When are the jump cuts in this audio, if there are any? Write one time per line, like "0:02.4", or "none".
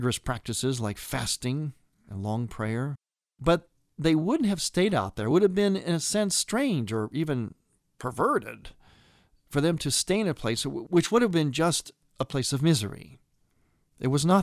none